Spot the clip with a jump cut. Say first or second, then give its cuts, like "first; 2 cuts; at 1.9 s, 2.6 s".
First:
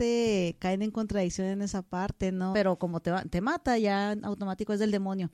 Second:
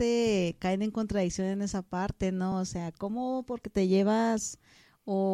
first; 1 cut; at 2.5 s